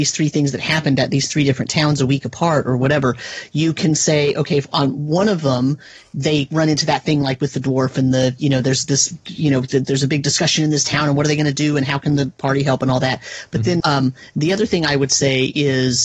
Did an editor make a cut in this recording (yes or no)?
yes